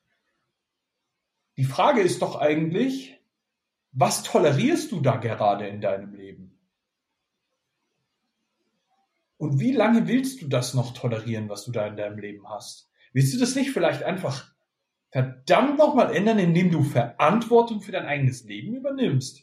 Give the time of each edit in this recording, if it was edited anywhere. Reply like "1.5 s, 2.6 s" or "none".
none